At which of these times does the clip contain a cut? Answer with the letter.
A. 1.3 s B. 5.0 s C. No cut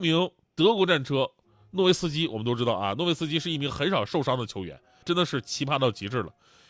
B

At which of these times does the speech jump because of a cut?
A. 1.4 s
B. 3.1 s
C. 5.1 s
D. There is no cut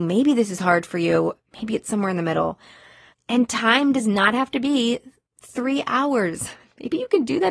B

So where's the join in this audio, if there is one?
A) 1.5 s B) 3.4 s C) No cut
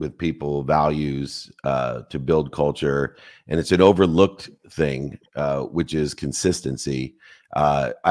C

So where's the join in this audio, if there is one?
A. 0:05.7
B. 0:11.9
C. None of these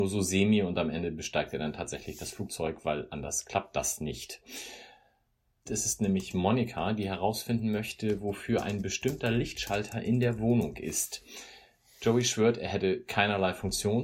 A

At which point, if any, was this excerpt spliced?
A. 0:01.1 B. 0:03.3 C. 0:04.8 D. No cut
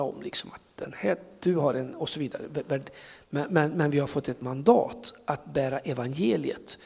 B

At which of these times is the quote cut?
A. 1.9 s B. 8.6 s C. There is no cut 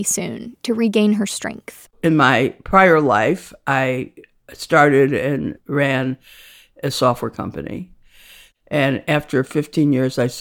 A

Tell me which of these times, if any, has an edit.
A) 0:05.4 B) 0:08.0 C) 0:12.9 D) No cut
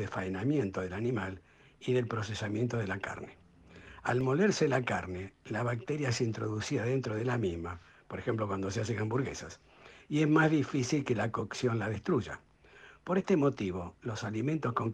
D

